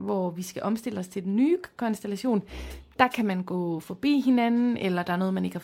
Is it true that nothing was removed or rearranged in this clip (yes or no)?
yes